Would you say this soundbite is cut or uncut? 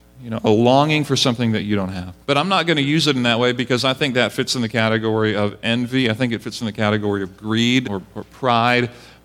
cut